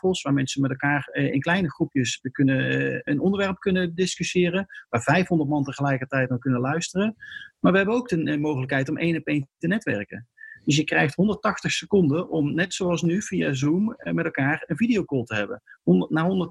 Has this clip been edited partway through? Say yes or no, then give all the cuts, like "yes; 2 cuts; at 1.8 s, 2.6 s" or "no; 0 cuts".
no; 0 cuts